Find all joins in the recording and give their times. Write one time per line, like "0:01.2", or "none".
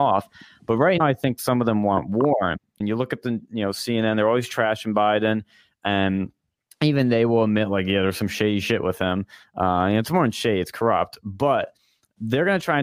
0:01.0
0:02.8

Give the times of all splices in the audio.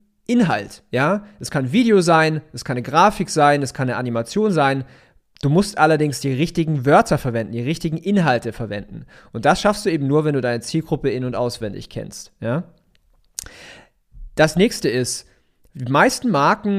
none

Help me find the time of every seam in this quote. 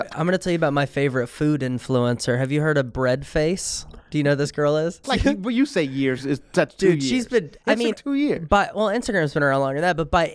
0:05.0
0:07.9

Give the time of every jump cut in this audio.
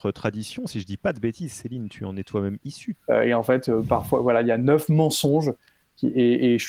0:02.9

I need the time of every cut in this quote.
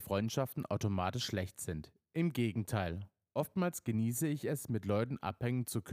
none

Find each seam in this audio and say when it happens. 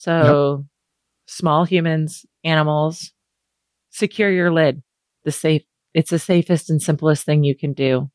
0:05.1

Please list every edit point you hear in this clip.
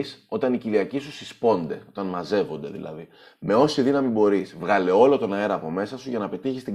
none

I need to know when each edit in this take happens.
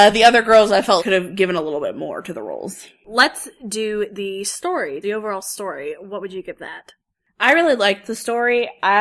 0:01.0
0:05.0

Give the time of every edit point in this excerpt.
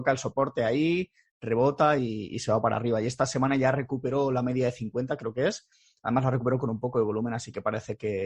none

